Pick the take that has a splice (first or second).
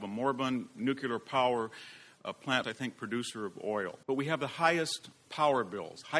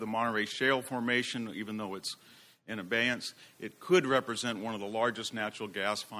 first